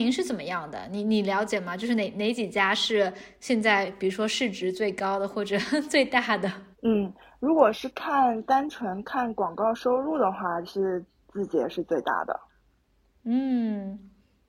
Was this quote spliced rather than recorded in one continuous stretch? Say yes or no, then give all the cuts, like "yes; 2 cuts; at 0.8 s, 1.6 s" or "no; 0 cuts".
yes; 1 cut; at 6.7 s